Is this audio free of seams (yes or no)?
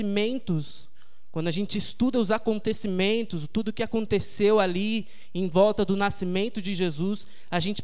yes